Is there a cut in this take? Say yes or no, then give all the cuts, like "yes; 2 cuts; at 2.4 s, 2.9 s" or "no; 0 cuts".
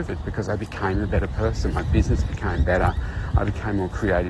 no; 0 cuts